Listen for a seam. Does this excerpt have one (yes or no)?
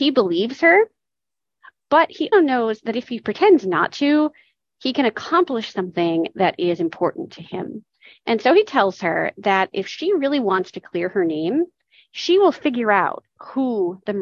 yes